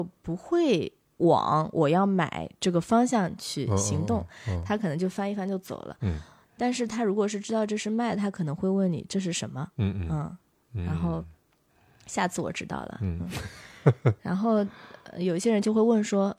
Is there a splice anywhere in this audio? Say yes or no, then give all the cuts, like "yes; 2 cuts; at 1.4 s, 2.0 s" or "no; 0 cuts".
no; 0 cuts